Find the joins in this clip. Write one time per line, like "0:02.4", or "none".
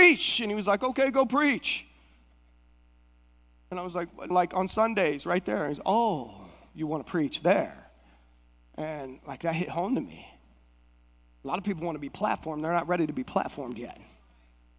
0:04.3